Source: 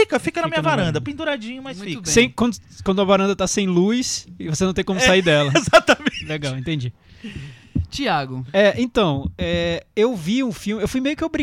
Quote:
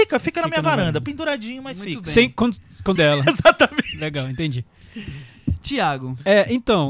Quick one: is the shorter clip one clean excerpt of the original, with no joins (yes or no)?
no